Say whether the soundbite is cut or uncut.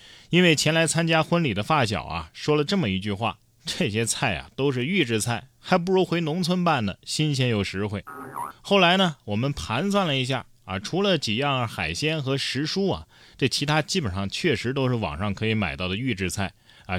cut